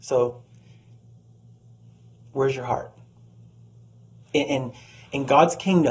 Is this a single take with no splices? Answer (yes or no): yes